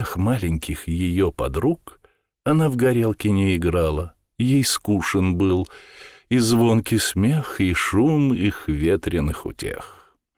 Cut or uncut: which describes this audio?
uncut